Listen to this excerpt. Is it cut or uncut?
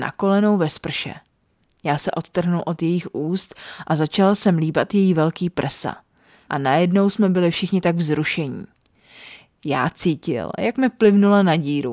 cut